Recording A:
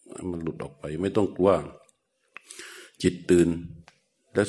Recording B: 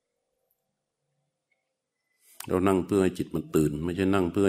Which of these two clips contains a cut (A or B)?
A